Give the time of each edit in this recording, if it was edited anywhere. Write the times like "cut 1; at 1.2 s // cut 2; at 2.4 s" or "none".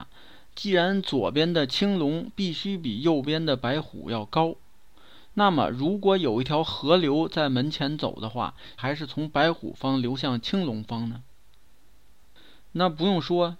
cut 1; at 8.8 s